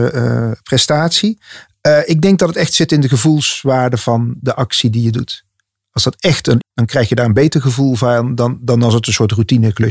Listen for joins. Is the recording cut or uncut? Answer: cut